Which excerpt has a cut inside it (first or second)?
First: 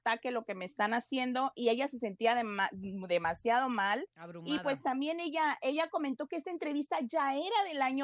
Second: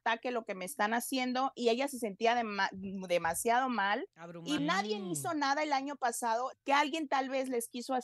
second